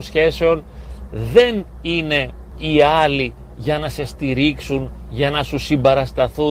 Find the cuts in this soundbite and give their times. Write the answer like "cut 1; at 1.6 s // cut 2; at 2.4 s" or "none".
cut 1; at 1.1 s